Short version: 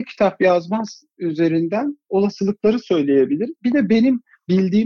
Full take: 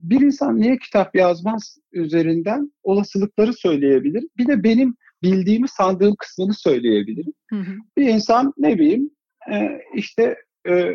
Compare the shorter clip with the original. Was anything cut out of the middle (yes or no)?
no